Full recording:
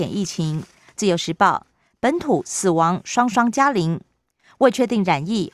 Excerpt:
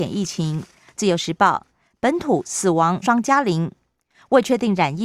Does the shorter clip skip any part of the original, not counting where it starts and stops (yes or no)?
yes